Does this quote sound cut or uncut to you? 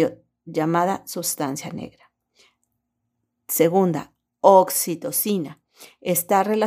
uncut